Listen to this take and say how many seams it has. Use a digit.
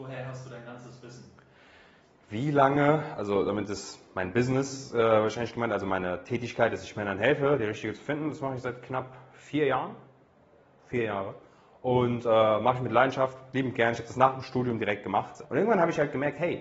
1